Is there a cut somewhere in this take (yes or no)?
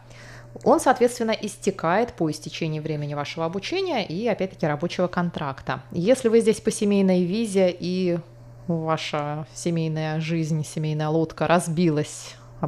no